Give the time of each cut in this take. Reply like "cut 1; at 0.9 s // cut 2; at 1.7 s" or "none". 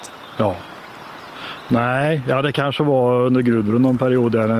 none